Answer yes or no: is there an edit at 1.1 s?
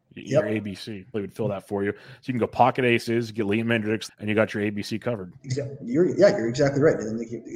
yes